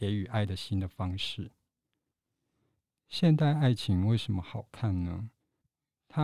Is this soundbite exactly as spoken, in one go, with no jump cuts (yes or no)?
yes